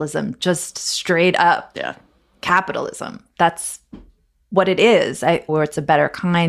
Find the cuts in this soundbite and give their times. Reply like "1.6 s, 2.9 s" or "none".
5.5 s